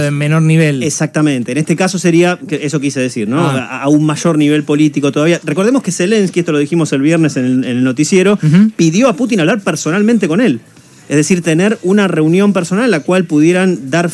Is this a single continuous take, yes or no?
yes